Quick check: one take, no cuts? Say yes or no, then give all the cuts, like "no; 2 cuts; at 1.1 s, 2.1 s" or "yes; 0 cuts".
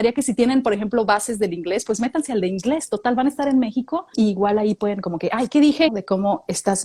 no; 2 cuts; at 4.1 s, 5.9 s